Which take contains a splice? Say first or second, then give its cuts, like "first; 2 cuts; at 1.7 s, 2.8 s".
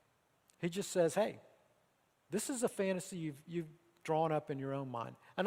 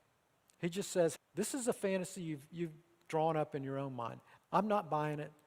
second; 2 cuts; at 1.2 s, 4.4 s